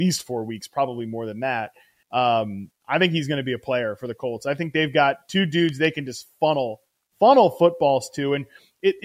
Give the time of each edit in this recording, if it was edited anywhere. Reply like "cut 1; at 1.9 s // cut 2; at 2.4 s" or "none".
cut 1; at 2.0 s